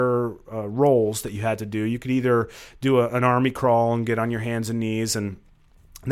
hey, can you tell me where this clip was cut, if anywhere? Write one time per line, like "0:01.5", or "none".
none